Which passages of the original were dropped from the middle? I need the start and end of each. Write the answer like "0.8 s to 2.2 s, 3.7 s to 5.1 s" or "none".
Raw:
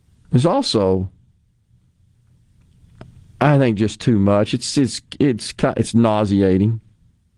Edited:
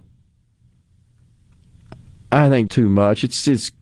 3.8 s to 4.0 s